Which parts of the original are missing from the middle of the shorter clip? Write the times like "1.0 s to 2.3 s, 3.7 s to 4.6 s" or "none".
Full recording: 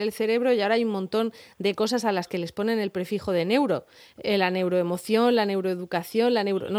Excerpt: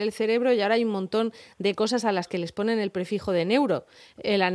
none

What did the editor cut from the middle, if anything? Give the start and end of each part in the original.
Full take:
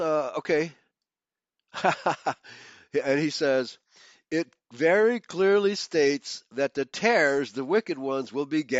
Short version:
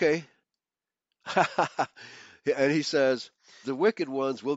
4.1 s to 7.5 s

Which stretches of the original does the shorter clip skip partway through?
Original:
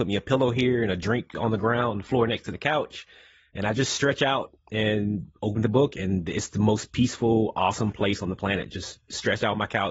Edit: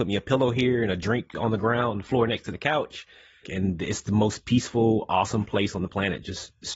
3.4 s to 5.9 s

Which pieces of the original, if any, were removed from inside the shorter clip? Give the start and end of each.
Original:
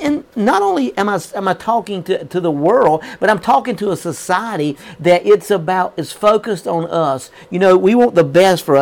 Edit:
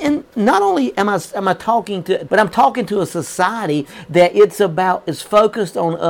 2.3 s to 3.2 s

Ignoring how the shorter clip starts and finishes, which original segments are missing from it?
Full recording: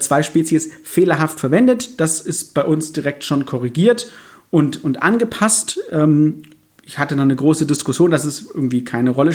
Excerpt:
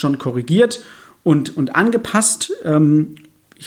none

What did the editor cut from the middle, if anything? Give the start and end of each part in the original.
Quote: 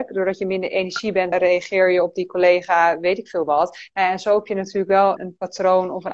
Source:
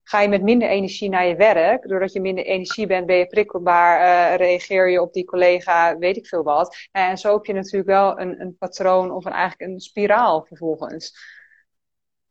3.1 s to 4.3 s, 8.1 s to 8.4 s

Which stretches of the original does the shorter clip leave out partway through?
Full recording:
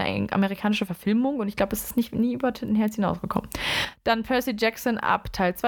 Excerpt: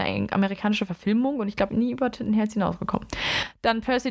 1.7 s to 2.1 s

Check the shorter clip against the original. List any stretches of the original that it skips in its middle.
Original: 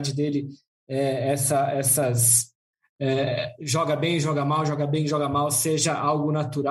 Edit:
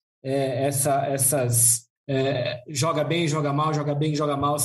2.6 s to 2.9 s

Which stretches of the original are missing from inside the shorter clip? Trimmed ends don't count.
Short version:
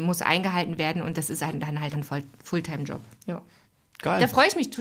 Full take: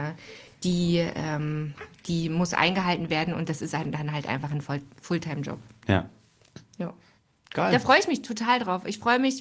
4.2 s to 4.5 s, 5.7 s to 6.7 s

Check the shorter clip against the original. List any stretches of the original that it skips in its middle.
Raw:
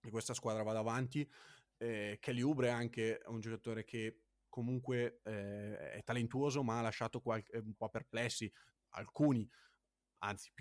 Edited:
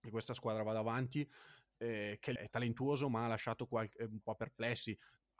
2.4 s to 5.9 s

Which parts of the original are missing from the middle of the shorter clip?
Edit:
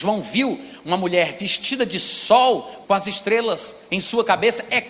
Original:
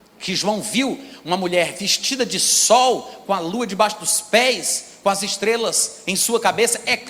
3.2 s to 5.0 s

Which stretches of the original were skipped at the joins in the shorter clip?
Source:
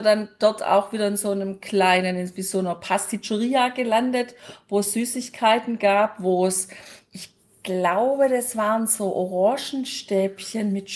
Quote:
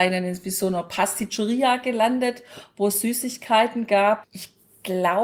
6.2 s to 7.0 s

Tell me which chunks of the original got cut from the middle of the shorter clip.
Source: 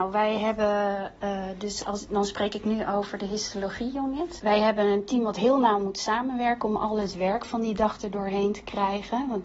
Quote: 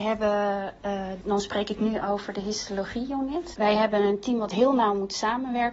1.6 s to 2.1 s

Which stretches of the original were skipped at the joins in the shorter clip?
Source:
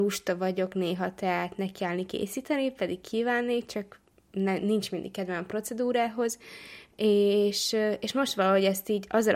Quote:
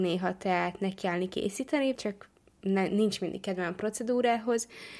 2.7 s to 3.7 s

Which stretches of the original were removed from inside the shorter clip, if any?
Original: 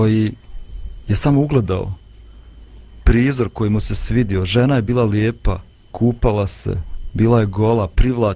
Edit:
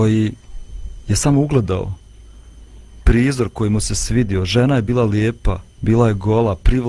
5.8 s to 7.1 s

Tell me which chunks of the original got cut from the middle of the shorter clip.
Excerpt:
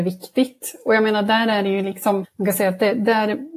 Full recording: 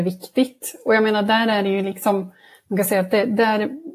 2.2 s to 2.5 s

